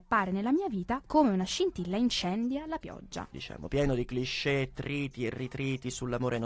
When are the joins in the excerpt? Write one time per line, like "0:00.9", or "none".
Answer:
0:03.3